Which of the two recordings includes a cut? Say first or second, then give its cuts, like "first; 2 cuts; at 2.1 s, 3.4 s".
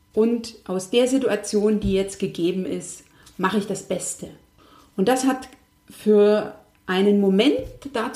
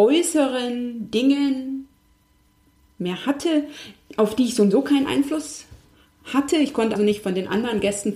second; 1 cut; at 7.0 s